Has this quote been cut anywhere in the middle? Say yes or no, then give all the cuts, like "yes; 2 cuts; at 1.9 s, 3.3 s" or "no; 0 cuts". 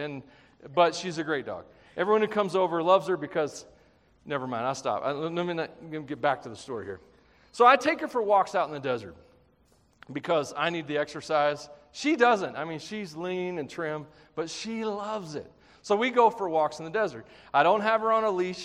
no; 0 cuts